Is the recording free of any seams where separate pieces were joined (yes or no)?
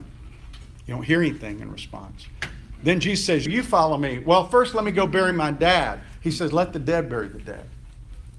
no